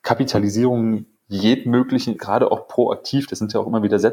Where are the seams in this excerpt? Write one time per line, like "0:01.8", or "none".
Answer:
0:02.1